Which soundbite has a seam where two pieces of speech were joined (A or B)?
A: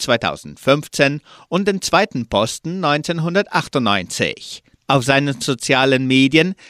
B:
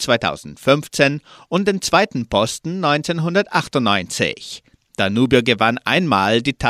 A